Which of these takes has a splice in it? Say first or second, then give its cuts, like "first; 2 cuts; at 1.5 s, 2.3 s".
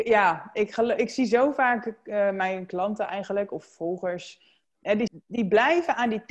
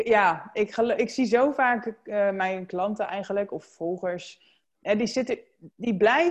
first; 1 cut; at 5.1 s